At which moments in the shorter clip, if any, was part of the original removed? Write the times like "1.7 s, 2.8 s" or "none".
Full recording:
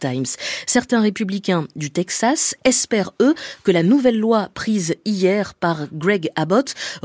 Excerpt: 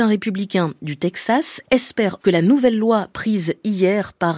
2.2 s